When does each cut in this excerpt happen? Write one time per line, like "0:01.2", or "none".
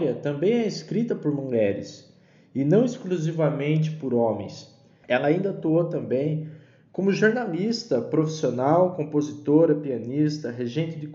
0:05.0